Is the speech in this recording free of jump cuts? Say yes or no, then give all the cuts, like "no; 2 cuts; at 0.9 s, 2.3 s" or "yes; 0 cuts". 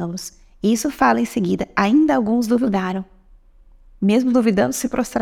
yes; 0 cuts